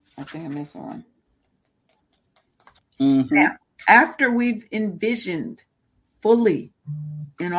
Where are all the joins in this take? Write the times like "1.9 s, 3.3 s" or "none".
2.8 s

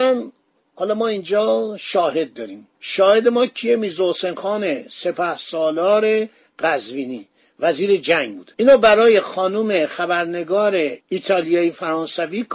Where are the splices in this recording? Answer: 2.8 s, 8.5 s, 11.0 s

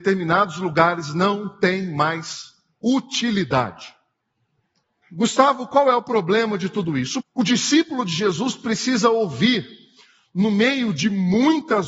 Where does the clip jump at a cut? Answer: 5.0 s, 7.2 s

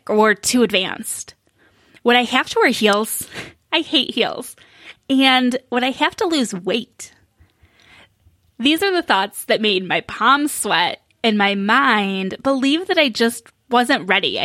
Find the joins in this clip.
none

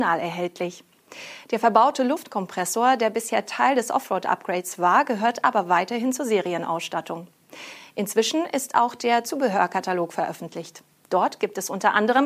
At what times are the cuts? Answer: none

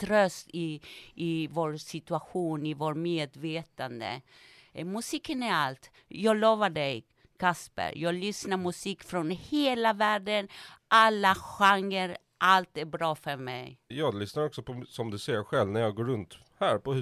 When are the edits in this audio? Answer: 13.9 s

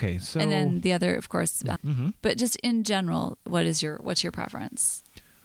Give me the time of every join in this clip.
1.8 s

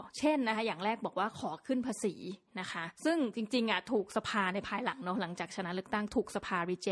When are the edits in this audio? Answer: 2.9 s

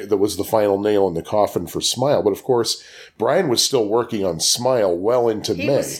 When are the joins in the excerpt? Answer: none

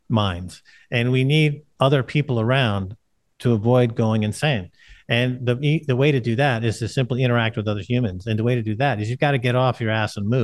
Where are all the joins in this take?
none

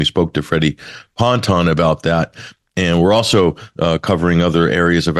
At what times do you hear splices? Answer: none

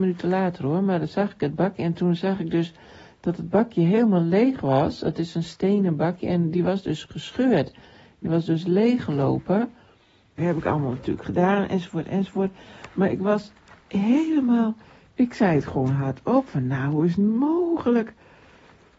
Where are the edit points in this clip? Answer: 10.4 s

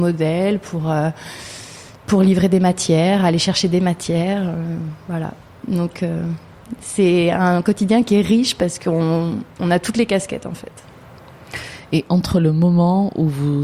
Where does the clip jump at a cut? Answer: none

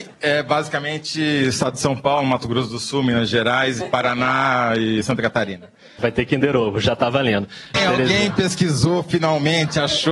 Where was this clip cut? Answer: 6.0 s, 7.7 s

